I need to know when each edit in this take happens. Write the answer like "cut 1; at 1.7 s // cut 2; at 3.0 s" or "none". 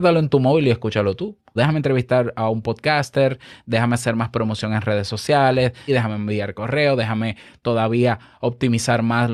cut 1; at 1.6 s // cut 2; at 5.9 s